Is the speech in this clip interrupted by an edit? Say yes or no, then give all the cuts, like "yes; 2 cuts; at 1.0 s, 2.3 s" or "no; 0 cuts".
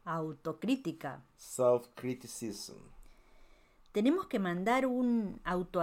no; 0 cuts